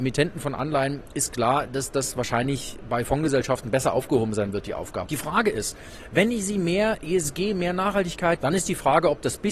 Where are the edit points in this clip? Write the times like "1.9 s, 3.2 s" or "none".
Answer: 5.0 s, 8.4 s